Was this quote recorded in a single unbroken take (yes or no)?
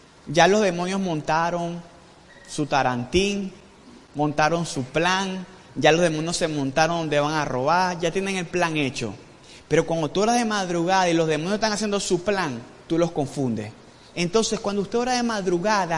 no